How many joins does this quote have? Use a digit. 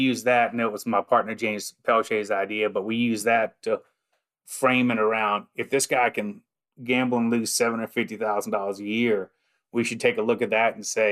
0